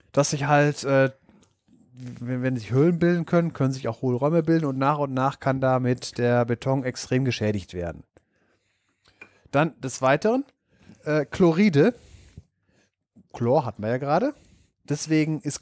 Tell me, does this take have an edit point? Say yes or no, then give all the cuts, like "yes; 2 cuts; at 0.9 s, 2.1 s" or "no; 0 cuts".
no; 0 cuts